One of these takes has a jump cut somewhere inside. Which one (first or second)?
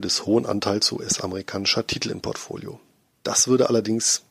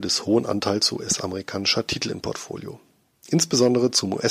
first